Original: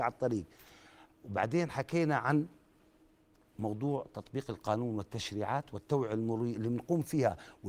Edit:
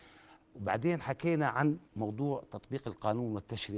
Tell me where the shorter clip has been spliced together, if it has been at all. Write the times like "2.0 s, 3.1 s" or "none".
1.9 s